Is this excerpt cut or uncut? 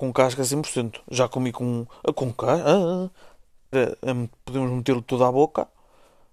cut